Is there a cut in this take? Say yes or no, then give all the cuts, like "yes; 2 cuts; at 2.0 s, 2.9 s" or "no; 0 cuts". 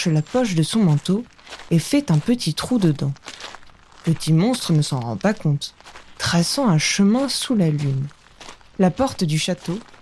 yes; 1 cut; at 6.2 s